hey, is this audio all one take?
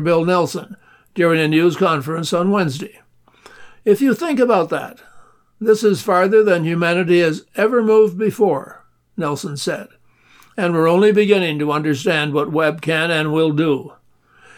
yes; 0 cuts

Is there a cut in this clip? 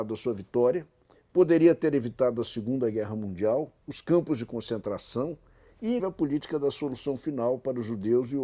yes; 2 cuts; at 3.8 s, 6.0 s

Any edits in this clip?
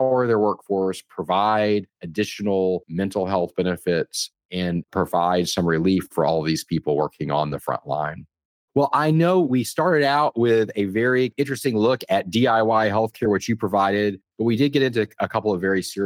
no; 0 cuts

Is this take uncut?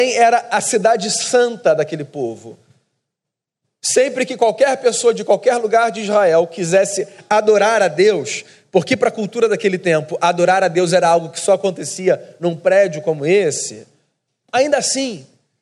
no; 1 cut; at 14.4 s

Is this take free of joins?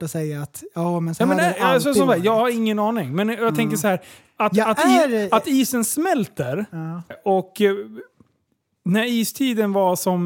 no; 1 cut; at 7.1 s

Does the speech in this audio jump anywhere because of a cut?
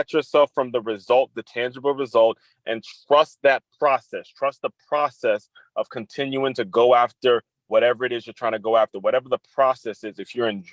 no; 0 cuts

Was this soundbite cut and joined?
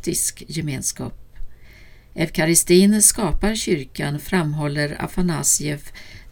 no; 0 cuts

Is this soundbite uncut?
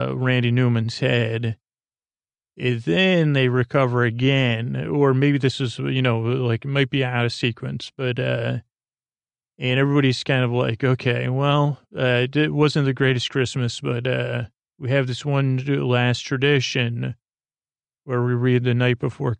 yes; 0 cuts

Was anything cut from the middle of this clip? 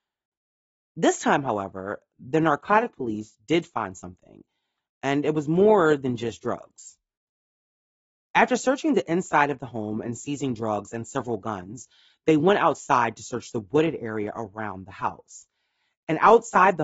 no; 0 cuts

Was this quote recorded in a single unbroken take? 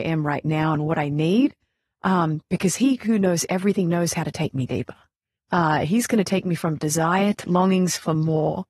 no; 2 cuts; at 5.4 s, 7.4 s

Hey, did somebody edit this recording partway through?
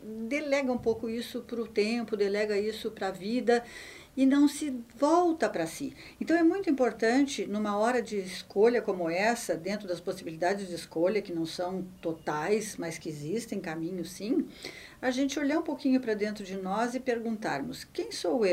no; 0 cuts

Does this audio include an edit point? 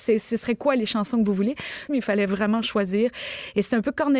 yes; 1 cut; at 1.9 s

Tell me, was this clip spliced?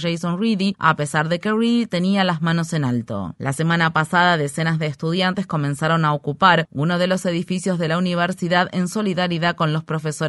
yes; 1 cut; at 3.4 s

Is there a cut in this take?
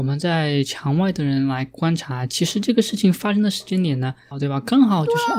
yes; 1 cut; at 4.3 s

